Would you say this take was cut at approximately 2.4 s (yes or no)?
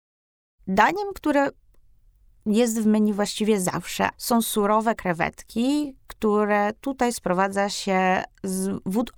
no